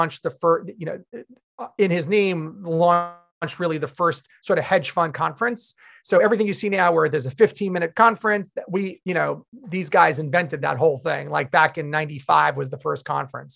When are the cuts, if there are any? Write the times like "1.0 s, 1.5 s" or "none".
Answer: none